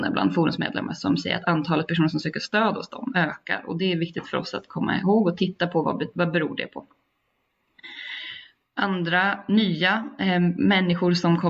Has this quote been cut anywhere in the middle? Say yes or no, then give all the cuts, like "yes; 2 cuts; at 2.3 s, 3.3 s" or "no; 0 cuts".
no; 0 cuts